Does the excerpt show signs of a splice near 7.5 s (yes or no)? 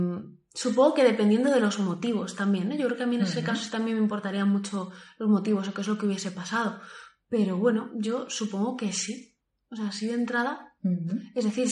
no